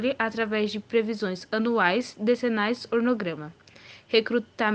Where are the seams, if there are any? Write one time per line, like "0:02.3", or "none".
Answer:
none